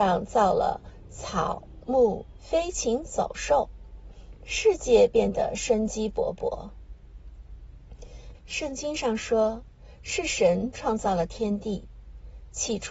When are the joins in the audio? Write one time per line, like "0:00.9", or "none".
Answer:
0:02.4
0:08.3